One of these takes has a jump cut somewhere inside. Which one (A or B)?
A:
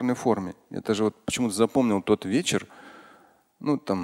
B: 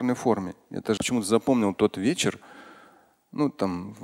B